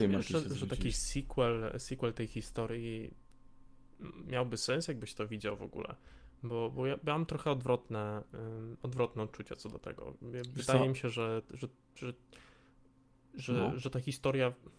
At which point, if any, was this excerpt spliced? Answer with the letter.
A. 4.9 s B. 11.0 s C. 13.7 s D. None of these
C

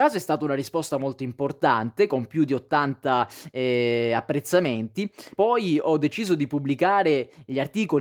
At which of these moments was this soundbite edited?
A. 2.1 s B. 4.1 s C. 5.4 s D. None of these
C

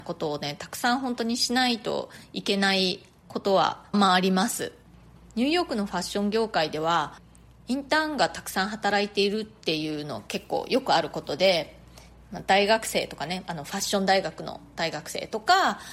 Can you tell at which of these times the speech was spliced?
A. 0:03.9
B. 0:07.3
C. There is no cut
A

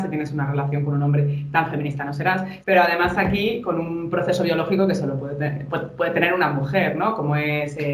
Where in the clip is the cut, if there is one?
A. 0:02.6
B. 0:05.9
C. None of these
A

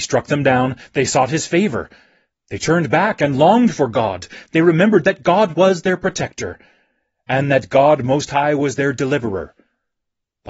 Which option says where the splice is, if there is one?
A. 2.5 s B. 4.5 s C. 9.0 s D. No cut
D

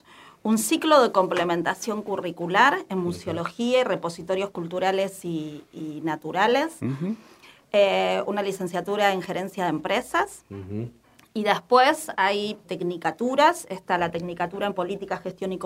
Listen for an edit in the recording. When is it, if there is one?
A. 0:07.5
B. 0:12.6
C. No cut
B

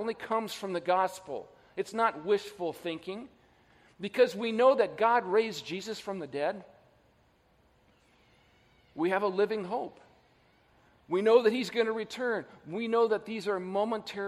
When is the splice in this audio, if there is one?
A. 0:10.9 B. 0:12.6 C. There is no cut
C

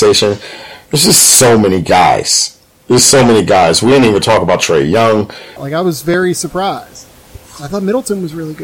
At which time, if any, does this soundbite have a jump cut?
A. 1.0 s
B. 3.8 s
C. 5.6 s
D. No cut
C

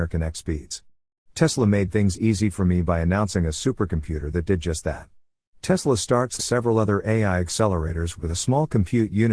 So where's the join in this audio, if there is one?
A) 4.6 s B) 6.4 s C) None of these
B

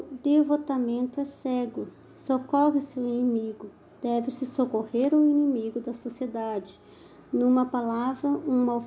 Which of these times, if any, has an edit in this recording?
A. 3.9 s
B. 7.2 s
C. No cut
C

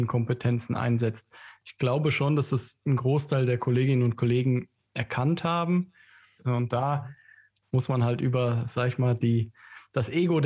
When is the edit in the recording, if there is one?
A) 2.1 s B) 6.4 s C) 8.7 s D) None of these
B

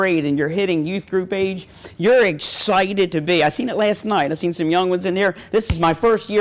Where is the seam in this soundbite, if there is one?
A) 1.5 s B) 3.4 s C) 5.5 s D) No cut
D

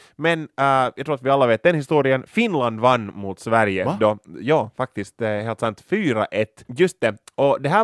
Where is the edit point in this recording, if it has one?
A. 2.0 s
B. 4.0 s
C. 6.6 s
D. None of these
C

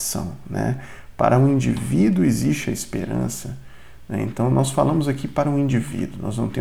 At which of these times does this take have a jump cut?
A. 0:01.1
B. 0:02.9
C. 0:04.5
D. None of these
D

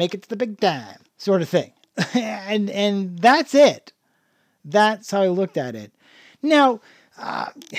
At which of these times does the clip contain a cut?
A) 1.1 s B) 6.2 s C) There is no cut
A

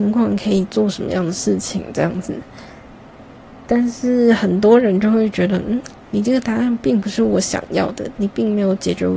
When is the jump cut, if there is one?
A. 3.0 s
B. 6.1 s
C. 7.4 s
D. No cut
D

